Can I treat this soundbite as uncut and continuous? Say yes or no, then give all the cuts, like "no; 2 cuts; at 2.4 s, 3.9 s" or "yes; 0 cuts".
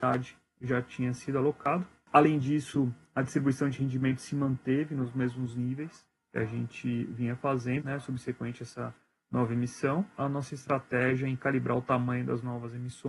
no; 2 cuts; at 7.8 s, 10.2 s